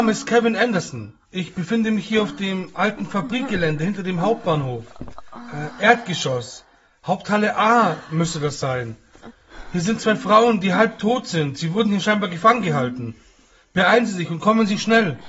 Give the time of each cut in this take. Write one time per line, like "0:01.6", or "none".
none